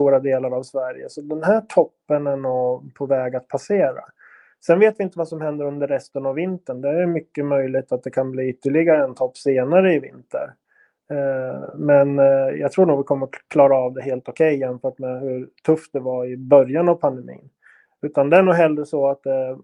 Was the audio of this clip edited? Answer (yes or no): no